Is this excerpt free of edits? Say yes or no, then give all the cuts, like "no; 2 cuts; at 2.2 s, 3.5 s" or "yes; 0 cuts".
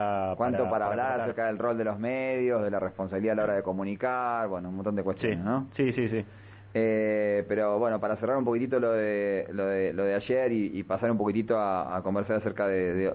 yes; 0 cuts